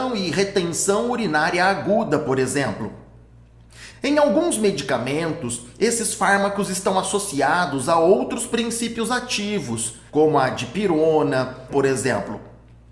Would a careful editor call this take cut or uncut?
cut